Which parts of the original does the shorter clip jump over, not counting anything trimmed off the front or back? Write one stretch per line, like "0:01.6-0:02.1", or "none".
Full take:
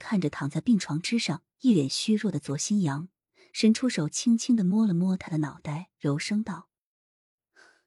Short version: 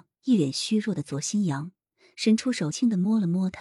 0:04.1-0:04.4